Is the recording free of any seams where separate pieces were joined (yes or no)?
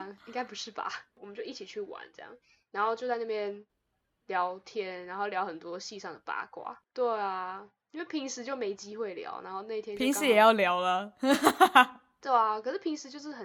no